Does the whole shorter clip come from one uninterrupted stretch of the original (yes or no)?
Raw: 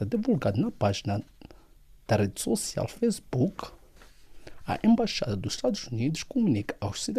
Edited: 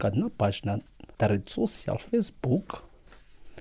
no